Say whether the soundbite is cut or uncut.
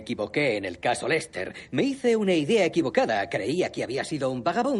uncut